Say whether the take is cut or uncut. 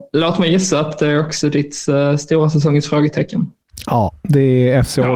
uncut